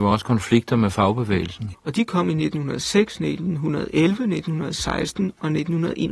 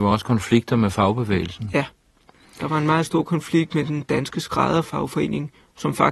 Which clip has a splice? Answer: first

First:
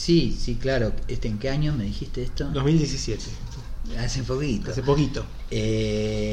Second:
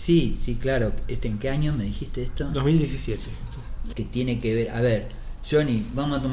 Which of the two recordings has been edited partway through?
second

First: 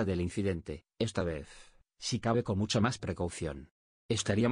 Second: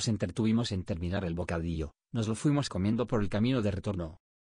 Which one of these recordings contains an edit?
first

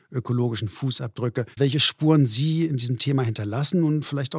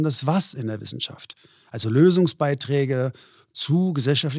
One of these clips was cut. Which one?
first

